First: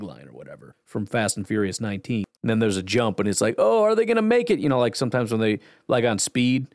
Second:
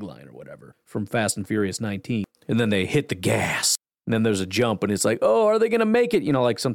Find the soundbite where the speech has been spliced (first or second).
first